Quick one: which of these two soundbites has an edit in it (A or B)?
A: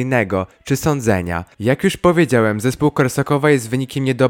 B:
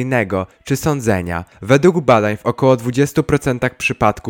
A